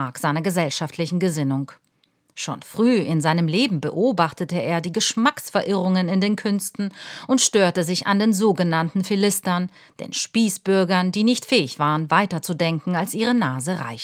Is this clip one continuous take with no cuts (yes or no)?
yes